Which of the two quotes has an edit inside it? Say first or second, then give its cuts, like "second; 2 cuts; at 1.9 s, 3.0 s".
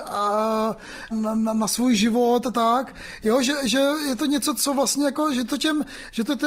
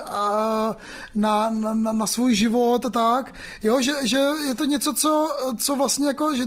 first; 2 cuts; at 1.1 s, 4.6 s